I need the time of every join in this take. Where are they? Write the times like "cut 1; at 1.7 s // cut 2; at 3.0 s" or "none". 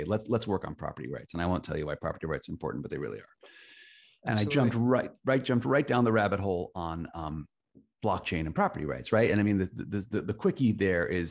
none